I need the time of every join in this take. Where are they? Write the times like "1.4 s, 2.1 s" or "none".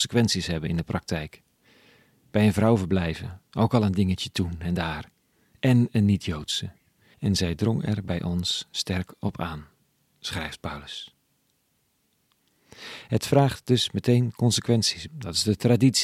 7.1 s, 15.1 s